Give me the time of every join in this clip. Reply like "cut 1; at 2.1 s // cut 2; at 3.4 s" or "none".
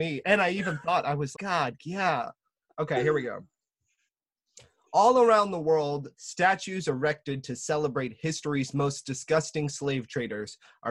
cut 1; at 1.3 s